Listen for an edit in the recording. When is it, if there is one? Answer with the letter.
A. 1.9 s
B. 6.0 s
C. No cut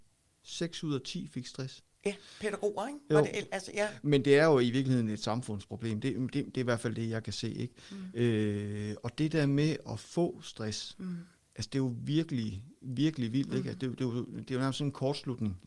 A